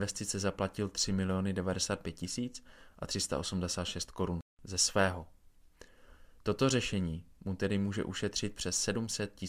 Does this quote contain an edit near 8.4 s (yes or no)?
no